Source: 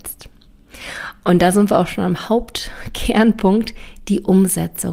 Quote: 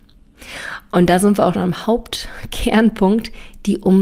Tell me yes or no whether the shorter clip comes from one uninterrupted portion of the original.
no